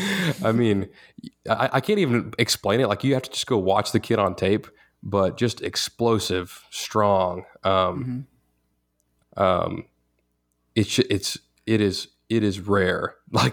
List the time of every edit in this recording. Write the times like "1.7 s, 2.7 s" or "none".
9.2 s

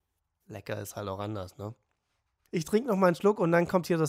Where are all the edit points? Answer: 2.5 s

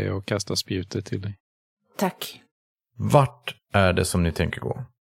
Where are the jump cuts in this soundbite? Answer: none

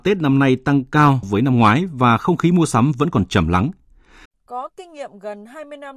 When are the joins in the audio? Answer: 1.2 s, 4.3 s

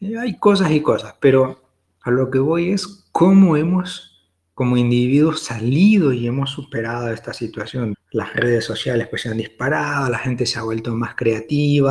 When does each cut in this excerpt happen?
7.9 s

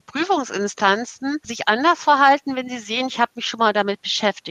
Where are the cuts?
none

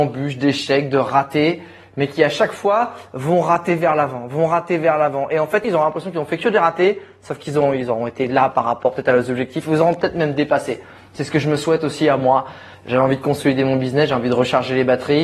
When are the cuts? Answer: 5.6 s, 12.7 s

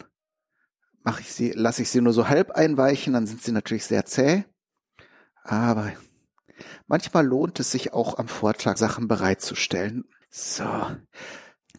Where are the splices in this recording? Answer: 8.8 s, 10.2 s

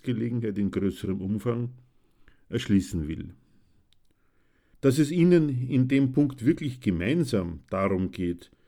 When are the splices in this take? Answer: 4.7 s

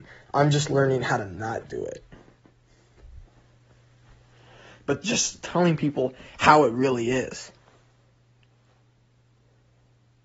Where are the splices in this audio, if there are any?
none

